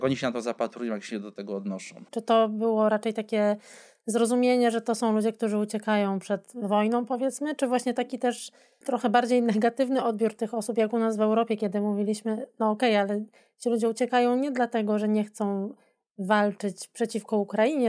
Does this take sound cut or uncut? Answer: cut